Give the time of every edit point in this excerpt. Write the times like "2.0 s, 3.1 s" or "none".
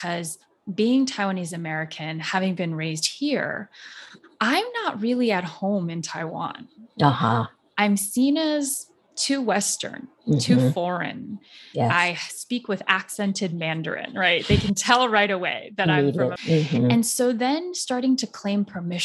16.4 s